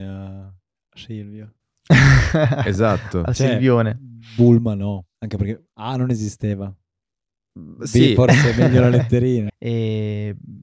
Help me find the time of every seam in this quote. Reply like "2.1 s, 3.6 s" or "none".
5.2 s, 9.5 s

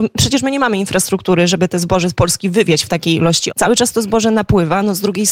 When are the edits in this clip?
3.5 s

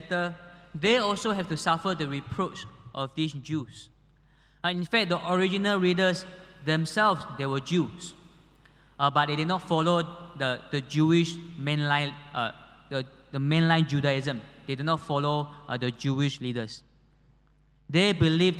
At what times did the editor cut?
none

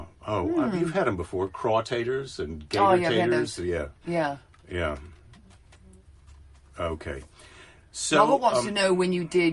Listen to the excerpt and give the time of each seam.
none

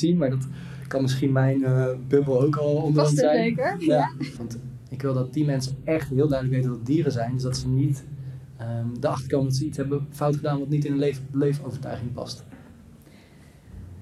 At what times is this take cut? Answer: 4.4 s

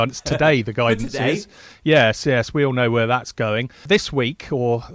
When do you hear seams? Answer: none

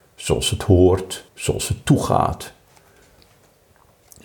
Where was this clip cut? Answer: 1.3 s

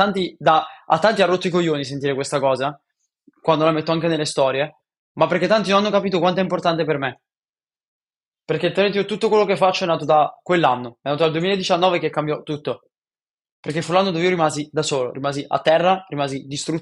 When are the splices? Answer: none

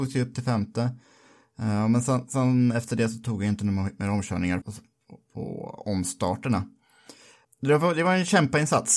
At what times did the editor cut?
4.6 s

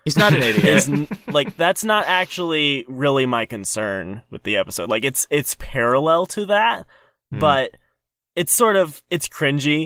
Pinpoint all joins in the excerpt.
8.2 s

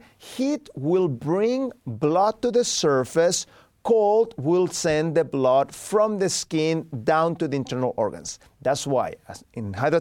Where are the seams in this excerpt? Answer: none

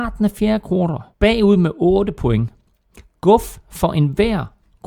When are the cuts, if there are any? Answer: 1.1 s

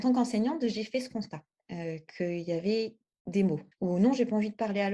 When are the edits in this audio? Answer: 3.7 s

